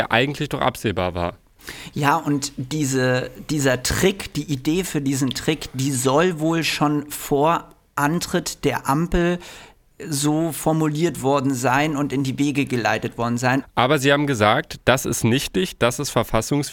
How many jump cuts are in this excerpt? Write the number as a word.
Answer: one